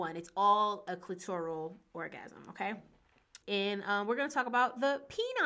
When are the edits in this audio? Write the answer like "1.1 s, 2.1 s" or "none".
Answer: 3.4 s